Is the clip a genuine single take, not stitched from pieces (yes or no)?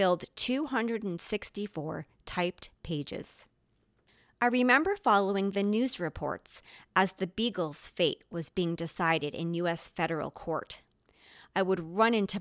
yes